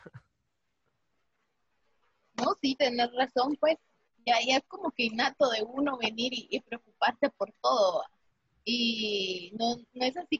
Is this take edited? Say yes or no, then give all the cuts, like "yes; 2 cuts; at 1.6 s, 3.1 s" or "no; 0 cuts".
no; 0 cuts